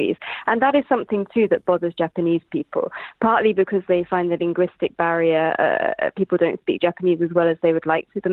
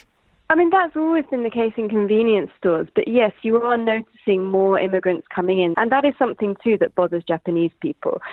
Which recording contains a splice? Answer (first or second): second